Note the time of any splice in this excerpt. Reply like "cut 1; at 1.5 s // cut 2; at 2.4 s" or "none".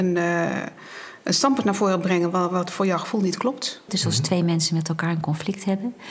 cut 1; at 3.9 s